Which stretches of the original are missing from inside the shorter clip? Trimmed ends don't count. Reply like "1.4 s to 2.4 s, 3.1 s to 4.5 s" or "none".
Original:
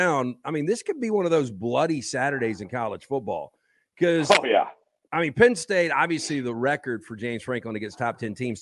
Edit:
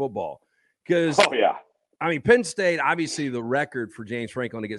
none

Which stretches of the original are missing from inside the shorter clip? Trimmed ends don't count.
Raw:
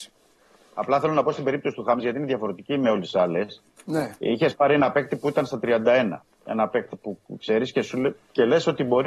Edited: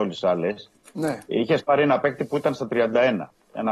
none

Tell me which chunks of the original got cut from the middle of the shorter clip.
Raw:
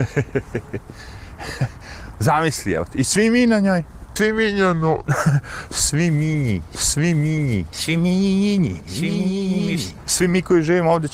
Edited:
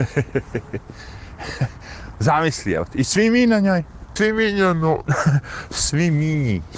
none

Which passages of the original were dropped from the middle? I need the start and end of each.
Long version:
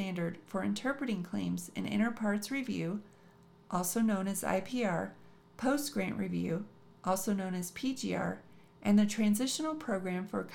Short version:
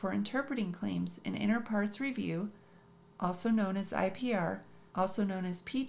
5.4 s to 7.0 s

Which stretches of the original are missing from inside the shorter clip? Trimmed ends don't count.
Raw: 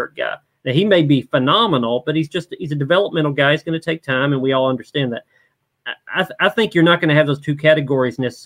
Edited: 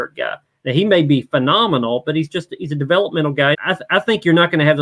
3.5 s to 6.0 s

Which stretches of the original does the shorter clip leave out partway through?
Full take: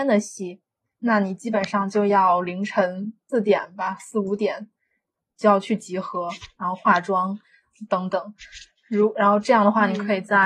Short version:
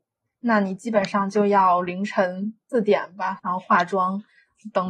4.0 s to 6.5 s

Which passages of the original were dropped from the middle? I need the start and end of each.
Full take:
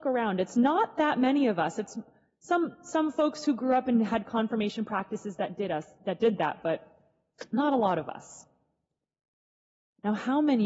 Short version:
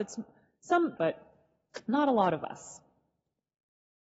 2.8 s to 6.6 s

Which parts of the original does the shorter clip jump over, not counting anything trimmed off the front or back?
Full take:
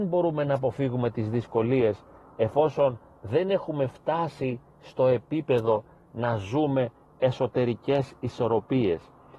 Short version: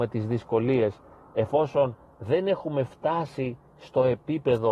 none

